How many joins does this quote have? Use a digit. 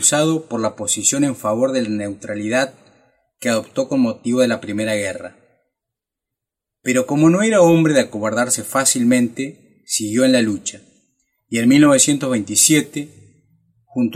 0